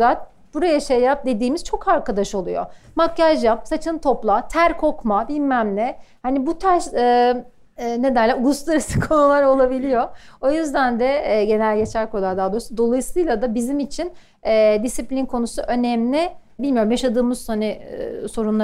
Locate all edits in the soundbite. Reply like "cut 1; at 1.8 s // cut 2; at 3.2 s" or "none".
none